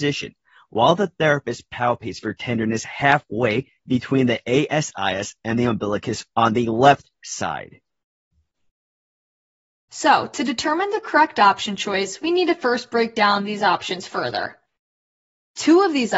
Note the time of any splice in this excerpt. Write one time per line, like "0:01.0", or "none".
none